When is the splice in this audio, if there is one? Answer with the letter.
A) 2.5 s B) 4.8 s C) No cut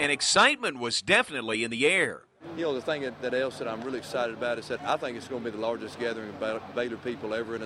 B